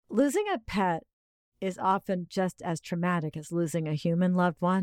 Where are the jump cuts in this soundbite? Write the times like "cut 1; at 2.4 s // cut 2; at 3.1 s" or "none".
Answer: none